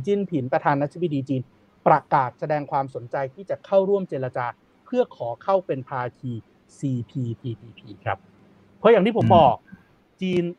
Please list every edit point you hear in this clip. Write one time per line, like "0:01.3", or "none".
none